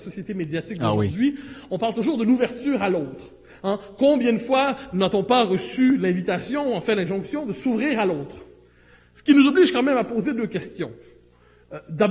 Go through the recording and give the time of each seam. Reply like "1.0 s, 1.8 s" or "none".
none